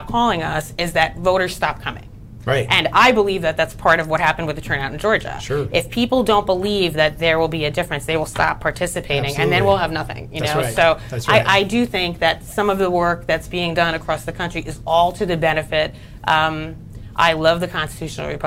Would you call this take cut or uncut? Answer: uncut